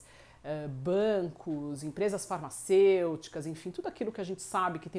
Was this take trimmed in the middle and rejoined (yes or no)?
no